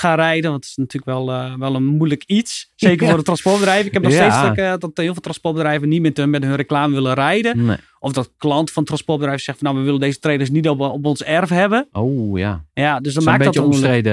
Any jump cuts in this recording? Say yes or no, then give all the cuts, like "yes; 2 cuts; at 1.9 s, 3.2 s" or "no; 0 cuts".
no; 0 cuts